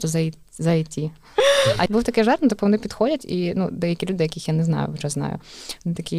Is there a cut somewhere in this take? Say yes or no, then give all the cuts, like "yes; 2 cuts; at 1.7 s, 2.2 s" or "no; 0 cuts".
yes; 1 cut; at 1.9 s